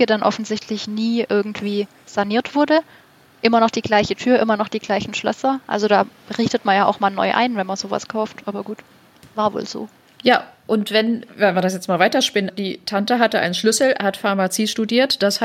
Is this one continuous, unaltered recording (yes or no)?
no